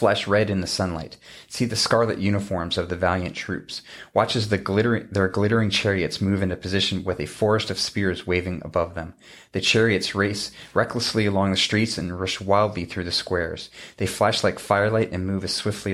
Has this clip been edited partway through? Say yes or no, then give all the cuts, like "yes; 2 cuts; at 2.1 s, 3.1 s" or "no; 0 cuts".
no; 0 cuts